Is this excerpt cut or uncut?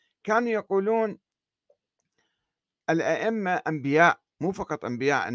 cut